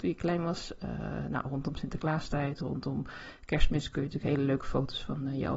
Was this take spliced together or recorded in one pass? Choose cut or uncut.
uncut